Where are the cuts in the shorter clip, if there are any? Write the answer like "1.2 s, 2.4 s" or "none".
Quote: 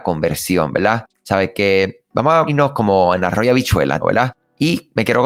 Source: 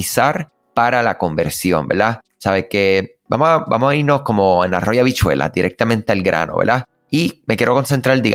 2.5 s, 4.0 s